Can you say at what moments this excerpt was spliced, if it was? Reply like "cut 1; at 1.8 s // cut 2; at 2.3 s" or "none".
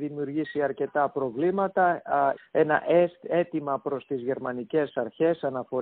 cut 1; at 2.4 s